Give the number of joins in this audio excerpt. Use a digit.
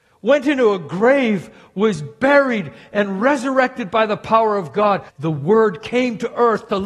1